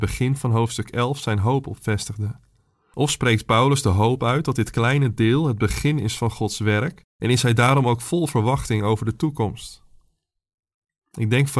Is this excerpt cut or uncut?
uncut